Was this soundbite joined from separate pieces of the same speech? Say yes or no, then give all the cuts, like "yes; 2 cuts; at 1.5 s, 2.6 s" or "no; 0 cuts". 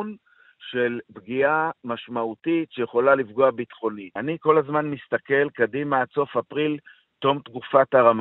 yes; 1 cut; at 4.2 s